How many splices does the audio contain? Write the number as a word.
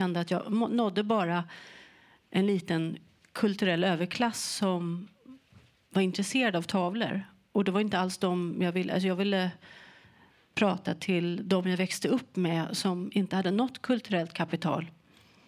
zero